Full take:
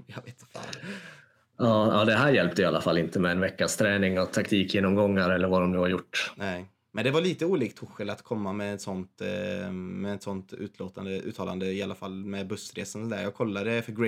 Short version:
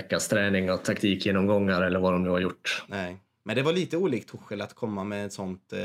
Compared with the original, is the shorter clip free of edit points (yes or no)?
yes